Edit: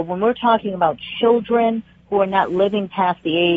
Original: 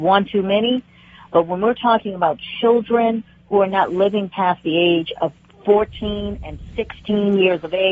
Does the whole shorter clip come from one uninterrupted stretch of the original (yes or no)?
yes